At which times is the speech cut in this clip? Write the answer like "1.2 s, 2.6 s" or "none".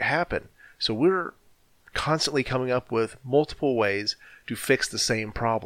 none